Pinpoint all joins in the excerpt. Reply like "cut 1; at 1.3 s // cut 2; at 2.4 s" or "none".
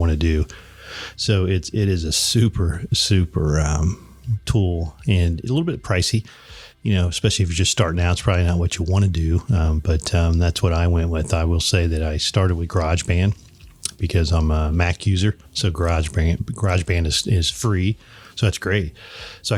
cut 1; at 15.4 s